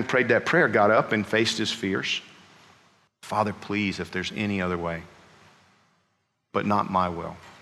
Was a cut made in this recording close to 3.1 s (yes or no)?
yes